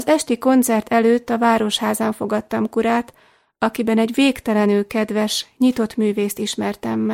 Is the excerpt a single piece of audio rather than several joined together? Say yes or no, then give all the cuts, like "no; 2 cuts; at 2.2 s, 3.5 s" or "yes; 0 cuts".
yes; 0 cuts